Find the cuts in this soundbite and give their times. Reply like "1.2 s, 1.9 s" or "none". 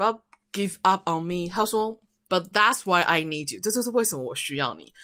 2.3 s